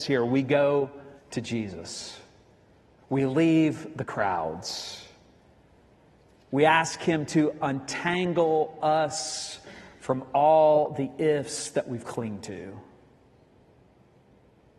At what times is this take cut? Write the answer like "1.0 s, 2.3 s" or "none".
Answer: none